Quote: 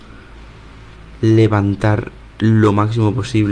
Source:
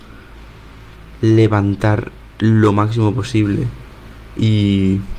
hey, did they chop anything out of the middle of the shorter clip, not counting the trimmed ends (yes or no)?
no